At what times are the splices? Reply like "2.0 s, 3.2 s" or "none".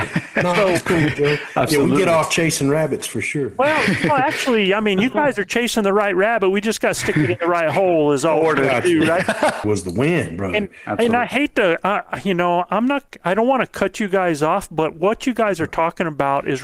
9.6 s